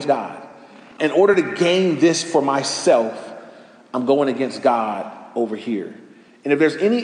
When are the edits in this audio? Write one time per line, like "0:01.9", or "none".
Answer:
0:01.0

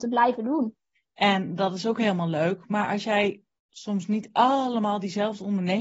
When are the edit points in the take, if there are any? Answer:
0:00.9

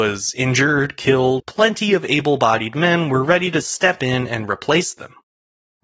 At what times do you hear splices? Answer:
0:01.4

